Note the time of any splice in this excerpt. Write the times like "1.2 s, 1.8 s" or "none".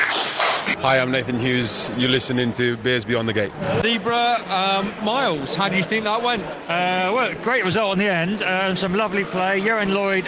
none